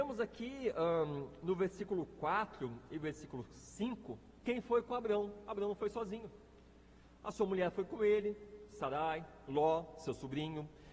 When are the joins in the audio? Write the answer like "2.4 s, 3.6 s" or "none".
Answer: none